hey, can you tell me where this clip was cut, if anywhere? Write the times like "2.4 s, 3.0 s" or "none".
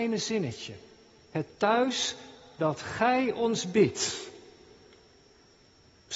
none